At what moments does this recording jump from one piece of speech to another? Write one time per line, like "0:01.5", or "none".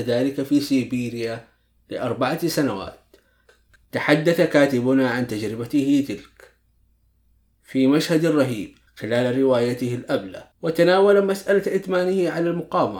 0:08.9
0:10.5